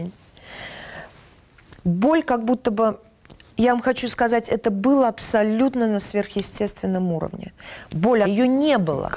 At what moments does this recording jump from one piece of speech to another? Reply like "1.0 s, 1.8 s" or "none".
3.5 s, 8.2 s